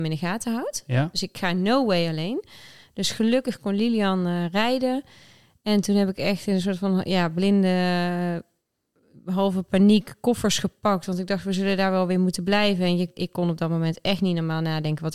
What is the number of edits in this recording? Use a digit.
0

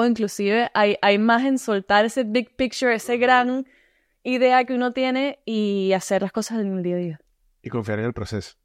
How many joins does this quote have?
0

